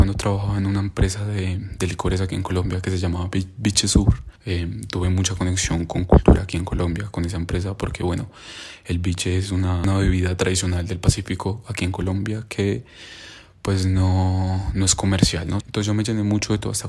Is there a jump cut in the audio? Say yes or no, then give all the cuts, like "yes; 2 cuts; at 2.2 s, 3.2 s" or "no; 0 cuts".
yes; 2 cuts; at 4.4 s, 15.6 s